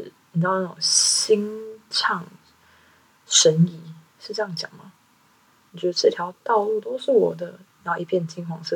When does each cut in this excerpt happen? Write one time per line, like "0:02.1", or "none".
0:05.7
0:07.7